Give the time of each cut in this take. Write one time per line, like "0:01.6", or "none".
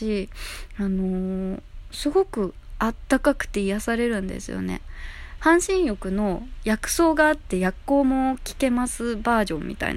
0:05.4